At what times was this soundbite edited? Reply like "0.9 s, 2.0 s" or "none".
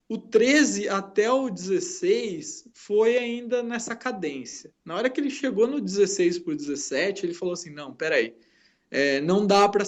none